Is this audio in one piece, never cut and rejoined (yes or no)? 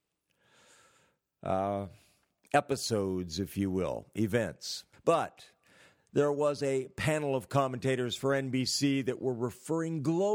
no